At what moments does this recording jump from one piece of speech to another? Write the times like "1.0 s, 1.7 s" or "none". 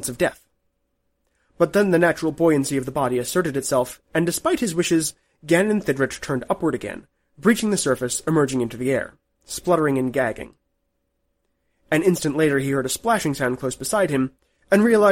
none